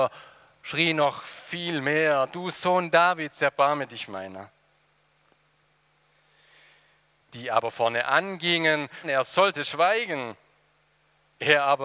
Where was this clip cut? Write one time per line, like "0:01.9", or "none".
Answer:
0:07.2
0:09.0